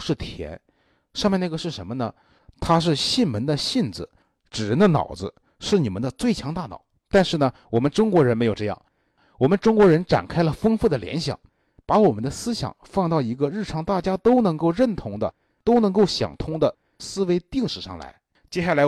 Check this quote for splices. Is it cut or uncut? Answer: cut